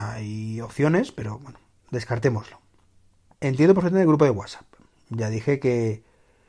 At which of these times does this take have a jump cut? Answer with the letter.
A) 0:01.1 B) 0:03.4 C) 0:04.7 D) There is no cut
B